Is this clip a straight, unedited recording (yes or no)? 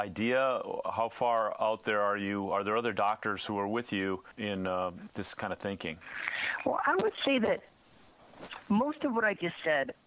yes